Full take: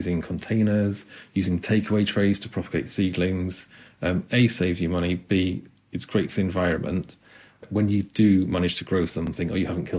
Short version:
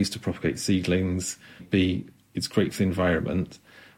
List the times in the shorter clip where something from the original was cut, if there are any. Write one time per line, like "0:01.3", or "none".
0:01.6